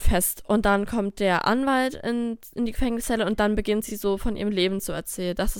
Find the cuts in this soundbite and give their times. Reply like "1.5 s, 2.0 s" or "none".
none

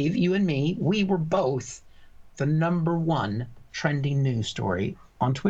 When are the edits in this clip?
2.3 s

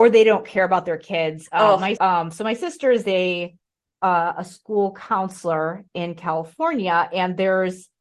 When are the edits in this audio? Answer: 2.0 s

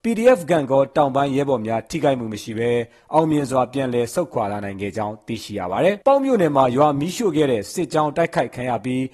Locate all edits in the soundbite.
6.0 s

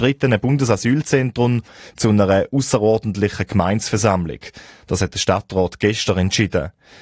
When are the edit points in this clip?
none

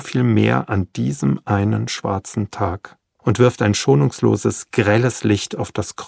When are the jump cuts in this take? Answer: 3.2 s

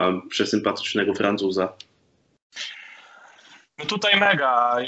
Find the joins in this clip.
none

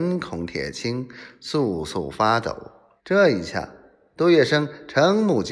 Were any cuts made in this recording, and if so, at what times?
3.0 s

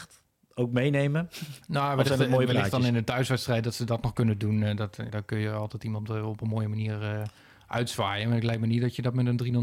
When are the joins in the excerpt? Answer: 5.1 s

